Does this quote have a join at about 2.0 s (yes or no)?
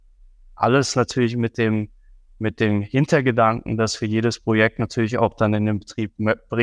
no